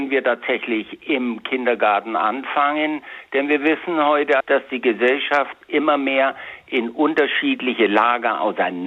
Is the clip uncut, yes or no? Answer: no